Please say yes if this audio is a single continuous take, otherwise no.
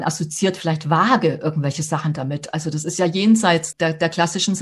no